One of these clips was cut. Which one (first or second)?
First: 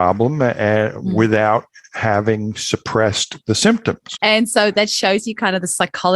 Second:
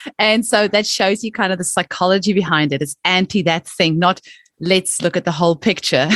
first